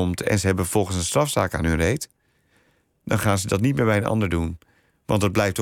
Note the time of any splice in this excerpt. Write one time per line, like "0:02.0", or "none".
none